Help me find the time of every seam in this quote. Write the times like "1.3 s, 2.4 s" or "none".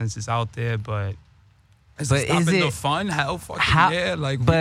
none